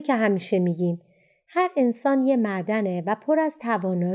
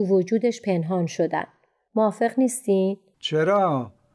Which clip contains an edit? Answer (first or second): second